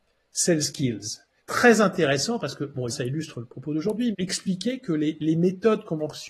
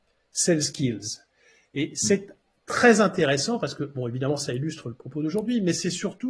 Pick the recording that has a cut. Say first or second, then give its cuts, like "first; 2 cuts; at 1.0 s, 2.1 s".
first; 3 cuts; at 1.4 s, 2.9 s, 4.1 s